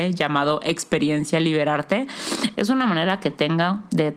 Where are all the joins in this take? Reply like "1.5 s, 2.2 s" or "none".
2.5 s